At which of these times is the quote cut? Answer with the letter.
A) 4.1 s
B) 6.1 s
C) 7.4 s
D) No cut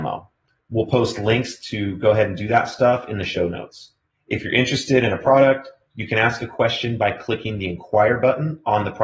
A